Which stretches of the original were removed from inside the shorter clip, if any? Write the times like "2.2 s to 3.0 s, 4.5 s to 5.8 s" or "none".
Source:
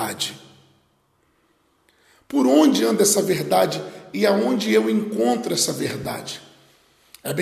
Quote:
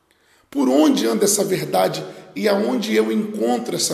none